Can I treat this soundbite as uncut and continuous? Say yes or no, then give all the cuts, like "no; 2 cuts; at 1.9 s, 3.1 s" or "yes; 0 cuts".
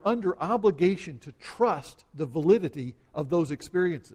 yes; 0 cuts